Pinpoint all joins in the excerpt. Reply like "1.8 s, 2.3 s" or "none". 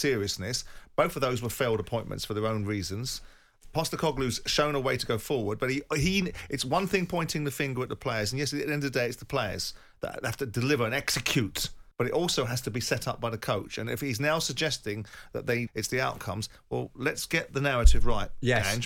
11.9 s, 15.7 s